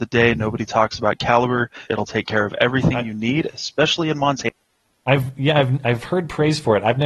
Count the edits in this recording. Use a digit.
1